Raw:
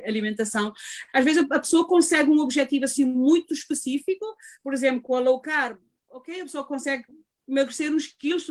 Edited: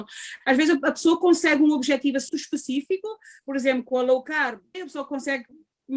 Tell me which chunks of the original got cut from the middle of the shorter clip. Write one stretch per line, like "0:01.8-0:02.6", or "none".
0:03.0-0:03.5
0:05.9-0:06.3